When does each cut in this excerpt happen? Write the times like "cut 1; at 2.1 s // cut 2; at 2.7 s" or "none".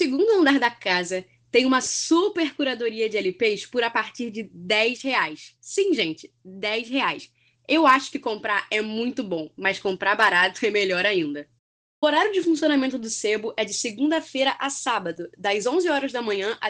none